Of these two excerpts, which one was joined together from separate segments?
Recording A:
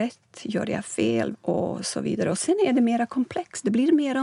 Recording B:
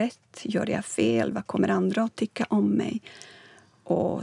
A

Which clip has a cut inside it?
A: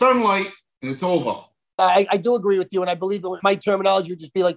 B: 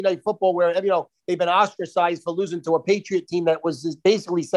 A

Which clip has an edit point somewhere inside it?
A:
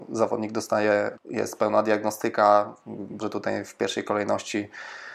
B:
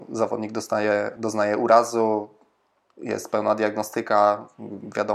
A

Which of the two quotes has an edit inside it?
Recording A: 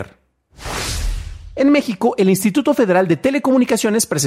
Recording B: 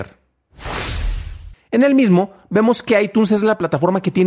B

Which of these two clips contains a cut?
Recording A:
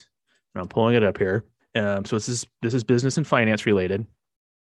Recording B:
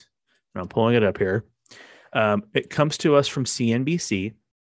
A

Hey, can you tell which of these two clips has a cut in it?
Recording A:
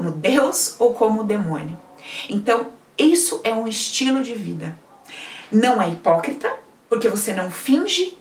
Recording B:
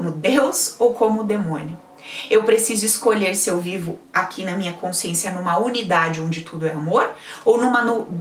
A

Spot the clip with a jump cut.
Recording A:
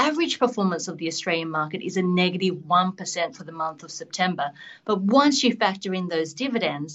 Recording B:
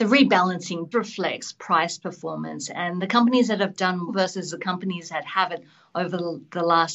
B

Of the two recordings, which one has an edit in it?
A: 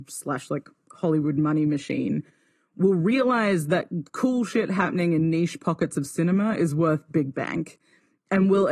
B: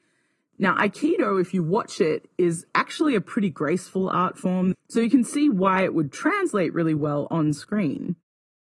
B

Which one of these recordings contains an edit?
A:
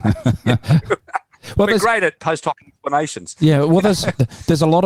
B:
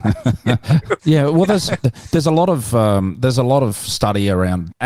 B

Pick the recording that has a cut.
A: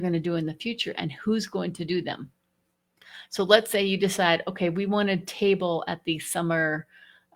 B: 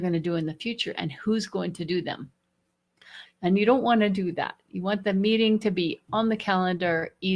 B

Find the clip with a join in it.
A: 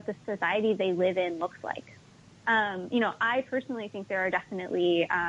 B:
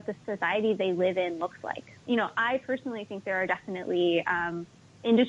B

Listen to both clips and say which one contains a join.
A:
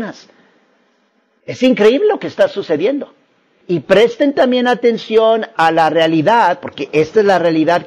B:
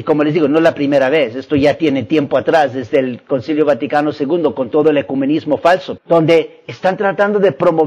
B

